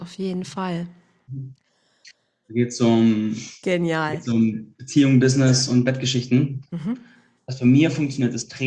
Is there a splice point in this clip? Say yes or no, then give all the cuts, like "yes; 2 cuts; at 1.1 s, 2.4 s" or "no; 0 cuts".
yes; 2 cuts; at 2.4 s, 6.7 s